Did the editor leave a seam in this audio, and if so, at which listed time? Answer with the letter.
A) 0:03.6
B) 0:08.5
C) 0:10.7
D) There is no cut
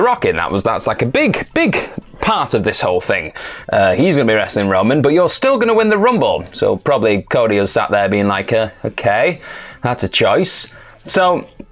A